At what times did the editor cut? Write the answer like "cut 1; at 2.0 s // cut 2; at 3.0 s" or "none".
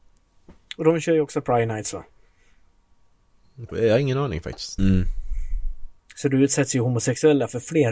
cut 1; at 3.7 s // cut 2; at 4.8 s